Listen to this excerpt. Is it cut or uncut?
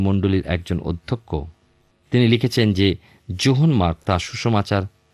uncut